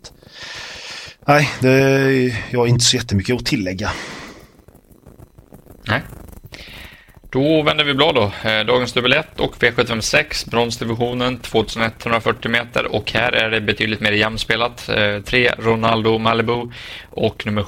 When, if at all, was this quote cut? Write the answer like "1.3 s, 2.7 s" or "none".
5.8 s